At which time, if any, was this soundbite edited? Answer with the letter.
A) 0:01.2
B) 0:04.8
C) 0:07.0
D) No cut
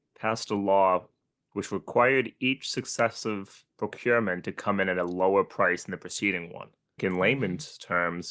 C